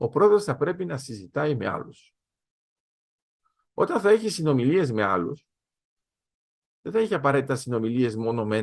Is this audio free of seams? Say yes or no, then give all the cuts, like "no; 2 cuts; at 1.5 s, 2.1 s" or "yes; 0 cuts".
yes; 0 cuts